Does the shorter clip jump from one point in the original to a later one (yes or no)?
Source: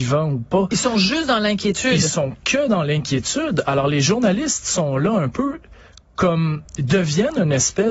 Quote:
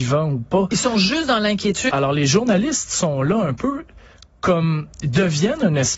yes